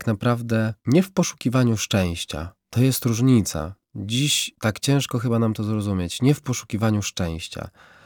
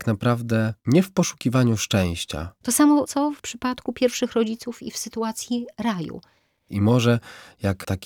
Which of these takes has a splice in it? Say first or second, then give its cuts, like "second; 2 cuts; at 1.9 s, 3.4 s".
second; 2 cuts; at 2.6 s, 6.7 s